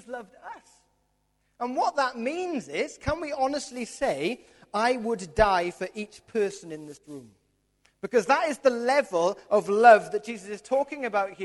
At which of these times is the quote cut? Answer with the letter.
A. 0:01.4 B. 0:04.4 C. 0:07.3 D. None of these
D